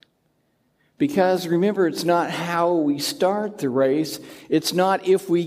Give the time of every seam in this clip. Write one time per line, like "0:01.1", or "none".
none